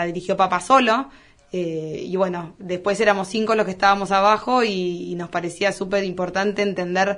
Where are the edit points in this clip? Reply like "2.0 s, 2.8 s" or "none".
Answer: none